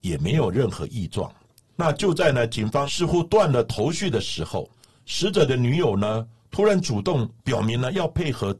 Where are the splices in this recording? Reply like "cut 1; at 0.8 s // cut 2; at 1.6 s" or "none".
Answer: none